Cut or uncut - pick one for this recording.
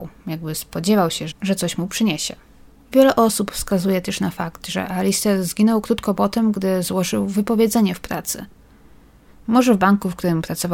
cut